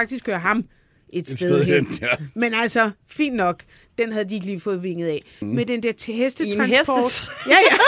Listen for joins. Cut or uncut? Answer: cut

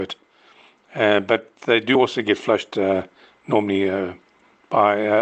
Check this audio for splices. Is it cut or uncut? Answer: uncut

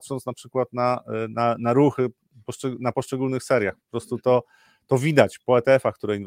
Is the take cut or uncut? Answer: uncut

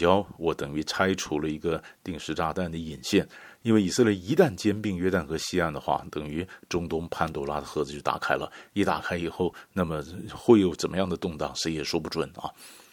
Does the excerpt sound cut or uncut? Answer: uncut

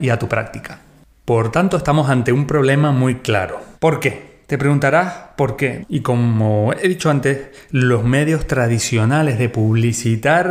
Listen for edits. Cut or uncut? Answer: cut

